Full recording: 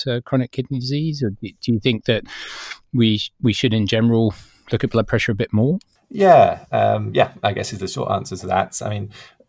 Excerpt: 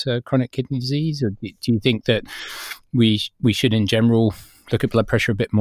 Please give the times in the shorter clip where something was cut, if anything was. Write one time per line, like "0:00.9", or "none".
none